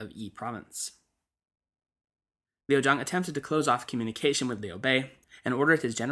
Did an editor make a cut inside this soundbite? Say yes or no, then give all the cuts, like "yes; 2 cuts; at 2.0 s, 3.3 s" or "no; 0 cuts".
yes; 1 cut; at 2.6 s